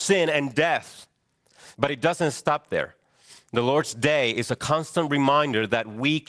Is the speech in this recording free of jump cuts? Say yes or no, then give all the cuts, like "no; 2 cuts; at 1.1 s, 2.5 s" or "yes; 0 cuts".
no; 1 cut; at 1.7 s